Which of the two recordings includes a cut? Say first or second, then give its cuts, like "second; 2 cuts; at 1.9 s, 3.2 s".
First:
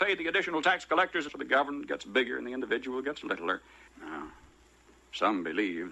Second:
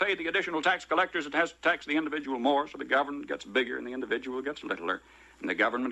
first; 2 cuts; at 1.3 s, 3.9 s